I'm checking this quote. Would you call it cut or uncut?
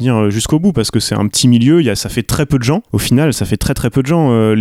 cut